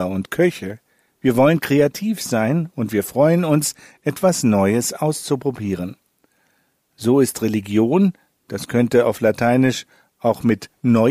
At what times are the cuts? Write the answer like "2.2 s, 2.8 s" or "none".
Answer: none